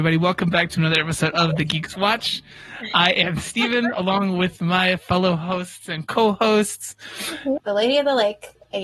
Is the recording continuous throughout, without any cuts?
no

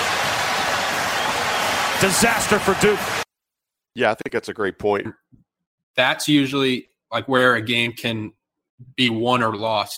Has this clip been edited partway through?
yes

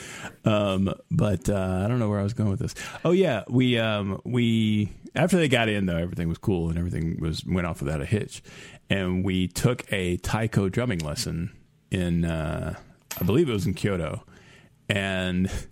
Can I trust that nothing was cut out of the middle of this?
yes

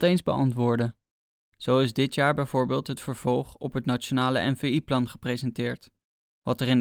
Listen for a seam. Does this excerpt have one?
yes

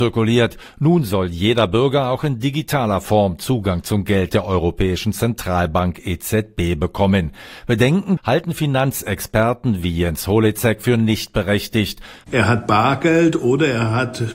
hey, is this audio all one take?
no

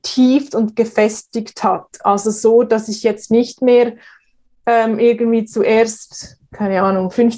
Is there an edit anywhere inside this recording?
no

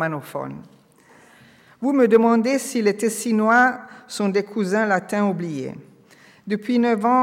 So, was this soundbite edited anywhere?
no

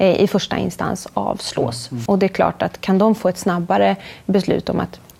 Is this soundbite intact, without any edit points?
no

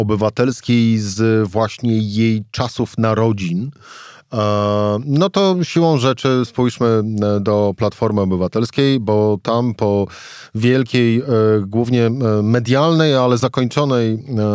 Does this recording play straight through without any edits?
yes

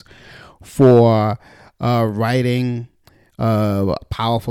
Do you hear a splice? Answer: no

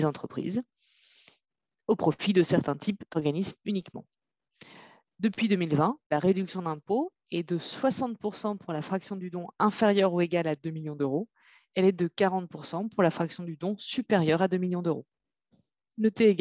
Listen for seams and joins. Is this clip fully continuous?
yes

